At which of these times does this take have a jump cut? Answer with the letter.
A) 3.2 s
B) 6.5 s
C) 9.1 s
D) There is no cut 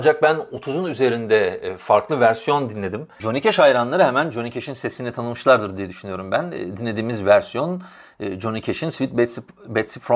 A